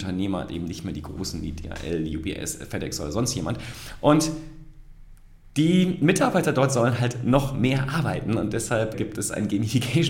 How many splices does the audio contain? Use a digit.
1